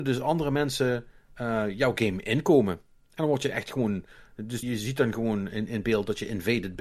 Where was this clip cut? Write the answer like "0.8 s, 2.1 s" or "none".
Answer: 4.6 s